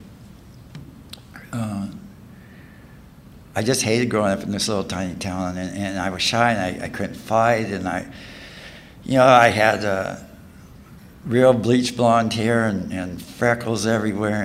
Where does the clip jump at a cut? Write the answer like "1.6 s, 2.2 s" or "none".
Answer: none